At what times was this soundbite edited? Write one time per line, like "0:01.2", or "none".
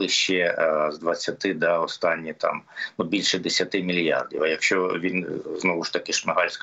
none